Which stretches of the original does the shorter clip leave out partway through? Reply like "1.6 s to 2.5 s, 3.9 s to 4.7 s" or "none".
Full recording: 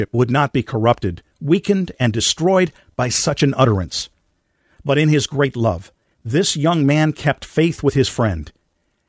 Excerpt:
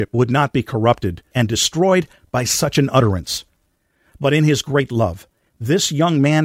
1.3 s to 1.9 s